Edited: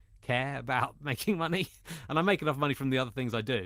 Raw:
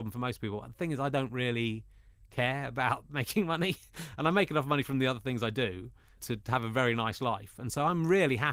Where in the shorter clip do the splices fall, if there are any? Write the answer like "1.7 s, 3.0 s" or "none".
none